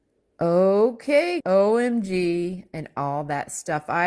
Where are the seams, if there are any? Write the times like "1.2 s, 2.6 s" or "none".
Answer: 1.4 s